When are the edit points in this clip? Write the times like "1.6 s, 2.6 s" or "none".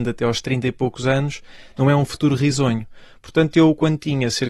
none